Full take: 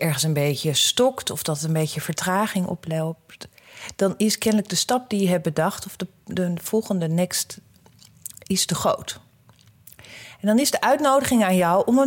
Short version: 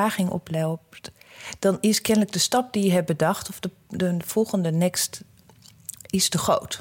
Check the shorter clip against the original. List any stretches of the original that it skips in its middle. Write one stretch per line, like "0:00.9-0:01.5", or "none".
none